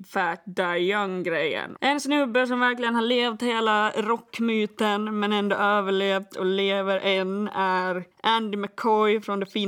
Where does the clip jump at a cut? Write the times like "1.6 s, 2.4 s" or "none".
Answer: 1.8 s, 8.1 s